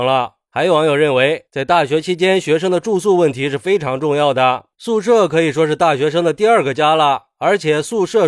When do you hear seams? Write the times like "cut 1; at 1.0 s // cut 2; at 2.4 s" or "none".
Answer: none